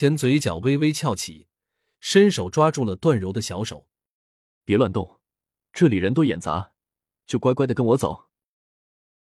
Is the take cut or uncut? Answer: cut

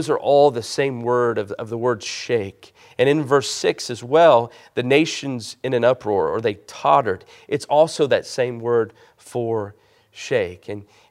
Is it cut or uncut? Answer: uncut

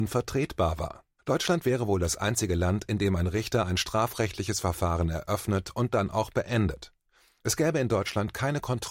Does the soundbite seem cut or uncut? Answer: cut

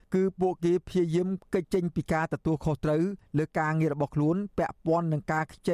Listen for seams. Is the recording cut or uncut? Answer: cut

